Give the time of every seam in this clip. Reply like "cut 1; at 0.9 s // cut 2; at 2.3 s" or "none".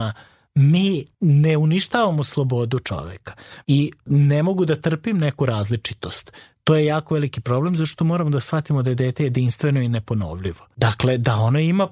cut 1; at 3.6 s